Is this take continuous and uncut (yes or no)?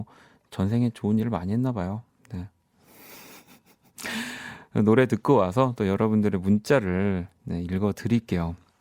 yes